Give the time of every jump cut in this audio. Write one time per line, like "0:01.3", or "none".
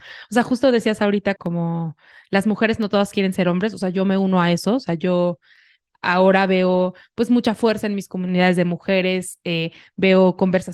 0:01.4